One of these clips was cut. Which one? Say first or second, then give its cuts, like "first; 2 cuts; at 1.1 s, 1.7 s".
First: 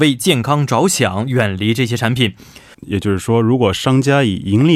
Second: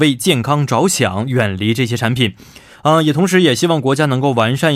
first; 1 cut; at 2.7 s